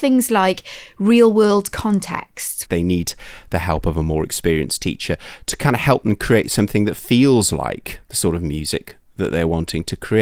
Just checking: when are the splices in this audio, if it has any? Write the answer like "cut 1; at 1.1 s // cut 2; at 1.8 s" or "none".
cut 1; at 2.7 s